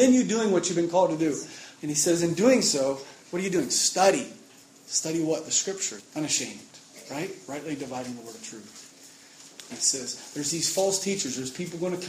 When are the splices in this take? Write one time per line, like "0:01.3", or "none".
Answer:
0:01.8
0:06.0
0:09.7